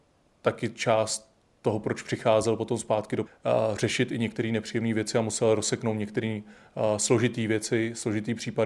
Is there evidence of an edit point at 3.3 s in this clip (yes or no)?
yes